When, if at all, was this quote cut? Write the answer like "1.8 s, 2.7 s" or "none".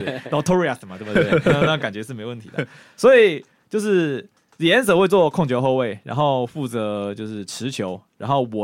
none